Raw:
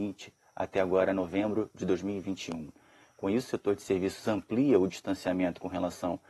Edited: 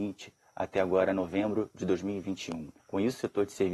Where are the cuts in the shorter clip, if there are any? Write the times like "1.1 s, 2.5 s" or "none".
2.8 s